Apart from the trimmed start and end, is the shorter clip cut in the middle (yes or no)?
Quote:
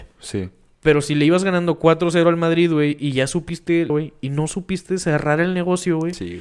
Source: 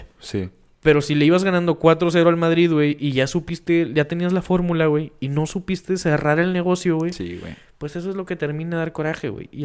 yes